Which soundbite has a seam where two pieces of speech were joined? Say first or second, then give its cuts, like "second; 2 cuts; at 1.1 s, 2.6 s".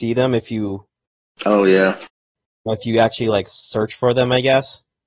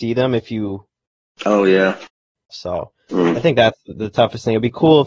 second; 1 cut; at 2.5 s